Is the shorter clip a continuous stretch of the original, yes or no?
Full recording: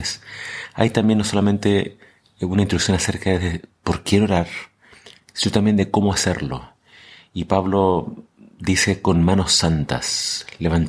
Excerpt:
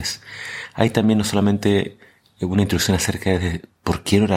yes